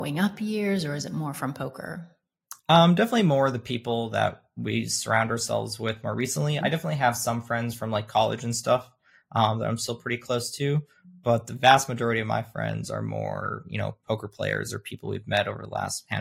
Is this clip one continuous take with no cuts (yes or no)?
no